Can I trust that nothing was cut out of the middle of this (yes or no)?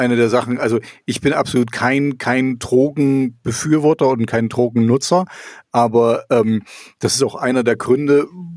yes